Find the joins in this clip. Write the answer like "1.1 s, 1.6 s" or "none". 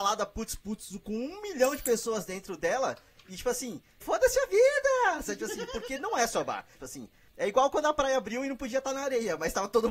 4.0 s, 6.7 s